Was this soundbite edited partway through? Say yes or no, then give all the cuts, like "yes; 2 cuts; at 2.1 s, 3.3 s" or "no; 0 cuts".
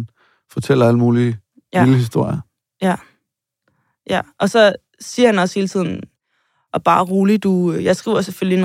no; 0 cuts